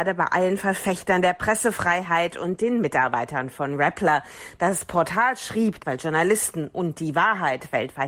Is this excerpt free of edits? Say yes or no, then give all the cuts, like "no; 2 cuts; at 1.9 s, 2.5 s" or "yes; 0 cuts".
no; 1 cut; at 5.8 s